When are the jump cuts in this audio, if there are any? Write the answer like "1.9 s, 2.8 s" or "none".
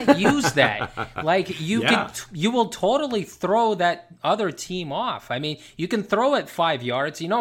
none

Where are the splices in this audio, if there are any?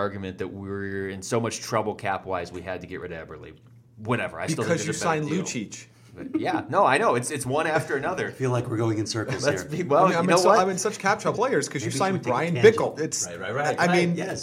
11.3 s, 13.0 s

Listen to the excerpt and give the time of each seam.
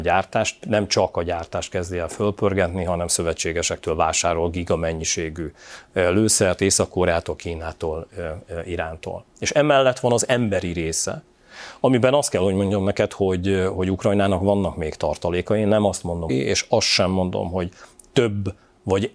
16.3 s

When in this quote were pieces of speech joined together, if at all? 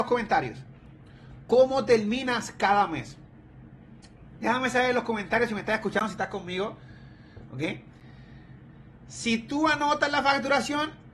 1.4 s

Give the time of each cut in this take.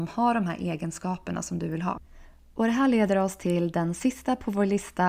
none

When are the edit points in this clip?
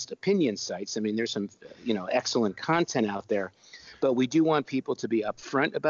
none

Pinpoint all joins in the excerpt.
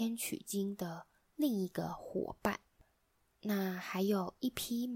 none

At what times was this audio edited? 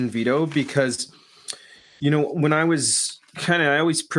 3.3 s

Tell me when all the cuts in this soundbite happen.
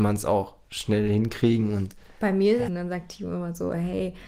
2.7 s

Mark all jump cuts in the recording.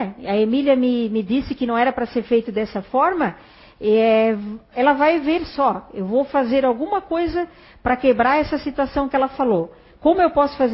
none

